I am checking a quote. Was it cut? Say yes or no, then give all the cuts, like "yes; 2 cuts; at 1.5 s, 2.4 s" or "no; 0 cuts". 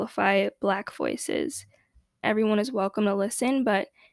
yes; 1 cut; at 2.2 s